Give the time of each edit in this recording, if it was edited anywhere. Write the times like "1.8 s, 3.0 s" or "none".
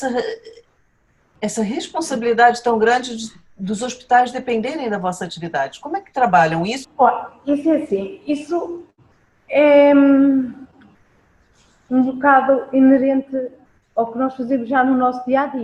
6.8 s